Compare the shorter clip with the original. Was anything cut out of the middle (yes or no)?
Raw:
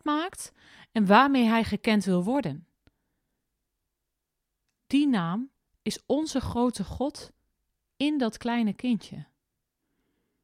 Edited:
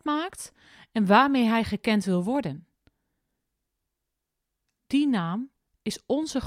no